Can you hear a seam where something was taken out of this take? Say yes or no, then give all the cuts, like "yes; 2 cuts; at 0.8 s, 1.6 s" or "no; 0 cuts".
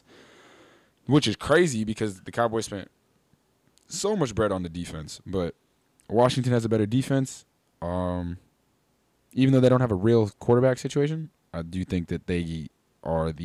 no; 0 cuts